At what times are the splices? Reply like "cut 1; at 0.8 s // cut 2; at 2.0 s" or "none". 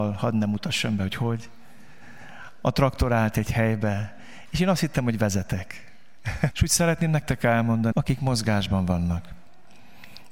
cut 1; at 6.5 s // cut 2; at 7.9 s